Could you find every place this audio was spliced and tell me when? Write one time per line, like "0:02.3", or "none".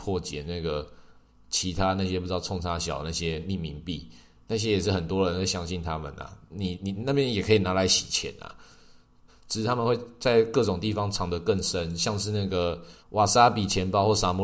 0:09.3
0:13.0